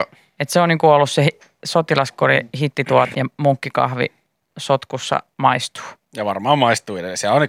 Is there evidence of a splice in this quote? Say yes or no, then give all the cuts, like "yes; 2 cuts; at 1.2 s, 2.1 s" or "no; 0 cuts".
yes; 1 cut; at 3.1 s